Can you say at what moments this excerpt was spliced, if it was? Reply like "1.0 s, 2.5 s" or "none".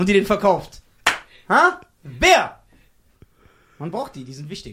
none